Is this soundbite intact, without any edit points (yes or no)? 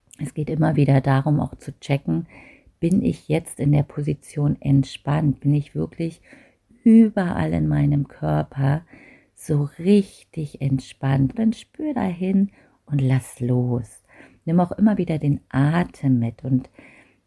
no